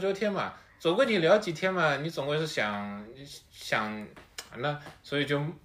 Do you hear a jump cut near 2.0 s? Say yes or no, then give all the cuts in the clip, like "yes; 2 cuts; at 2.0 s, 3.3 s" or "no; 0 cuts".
no; 1 cut; at 4.5 s